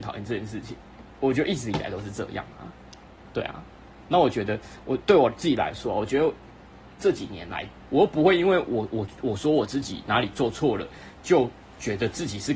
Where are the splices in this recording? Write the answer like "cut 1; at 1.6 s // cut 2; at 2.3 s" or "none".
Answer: cut 1; at 7.8 s